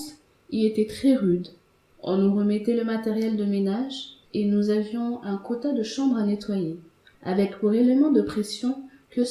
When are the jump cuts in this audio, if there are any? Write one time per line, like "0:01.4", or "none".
0:01.9
0:04.3
0:07.1